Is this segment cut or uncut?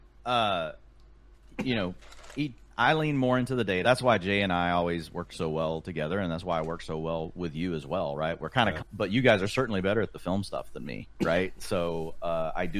cut